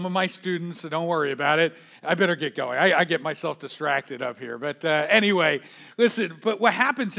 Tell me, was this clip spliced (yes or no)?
no